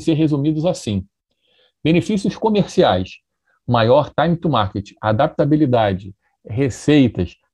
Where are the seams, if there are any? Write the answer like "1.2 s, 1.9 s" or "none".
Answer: none